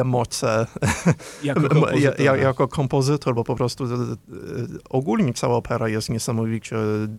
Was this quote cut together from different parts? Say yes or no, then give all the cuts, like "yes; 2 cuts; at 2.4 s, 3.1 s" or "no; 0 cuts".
no; 0 cuts